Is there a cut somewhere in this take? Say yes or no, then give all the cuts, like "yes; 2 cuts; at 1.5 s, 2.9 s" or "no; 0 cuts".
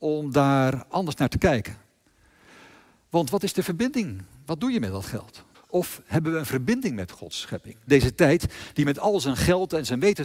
yes; 2 cuts; at 5.5 s, 7.9 s